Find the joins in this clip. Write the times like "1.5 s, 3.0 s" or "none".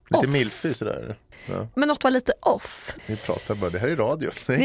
1.3 s, 3.0 s